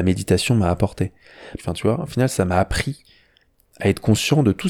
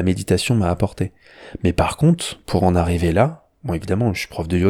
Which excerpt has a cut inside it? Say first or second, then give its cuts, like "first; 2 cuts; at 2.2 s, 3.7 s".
first; 1 cut; at 1.6 s